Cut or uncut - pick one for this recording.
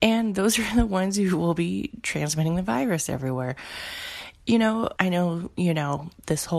cut